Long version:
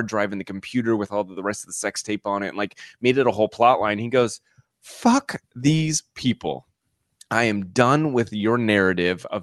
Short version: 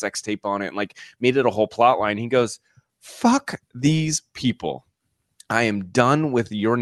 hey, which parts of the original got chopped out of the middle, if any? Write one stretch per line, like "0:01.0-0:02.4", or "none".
none